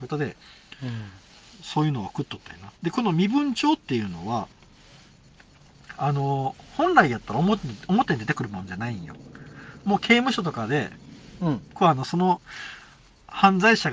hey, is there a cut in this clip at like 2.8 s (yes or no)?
yes